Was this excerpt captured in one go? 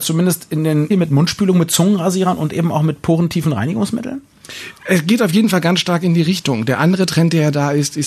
no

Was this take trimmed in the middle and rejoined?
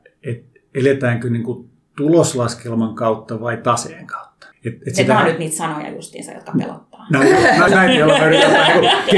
yes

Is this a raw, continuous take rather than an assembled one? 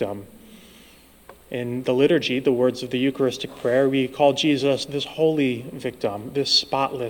yes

